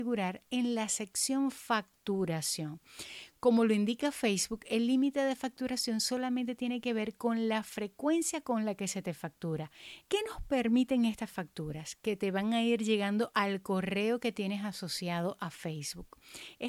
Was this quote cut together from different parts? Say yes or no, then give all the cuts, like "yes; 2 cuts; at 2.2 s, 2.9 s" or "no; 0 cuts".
yes; 1 cut; at 10.0 s